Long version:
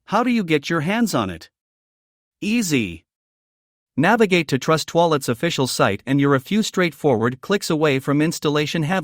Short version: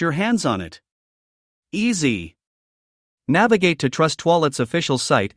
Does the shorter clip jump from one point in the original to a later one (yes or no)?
no